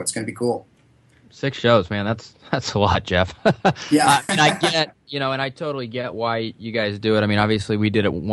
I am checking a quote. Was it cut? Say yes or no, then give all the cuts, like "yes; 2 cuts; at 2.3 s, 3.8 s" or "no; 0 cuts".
no; 0 cuts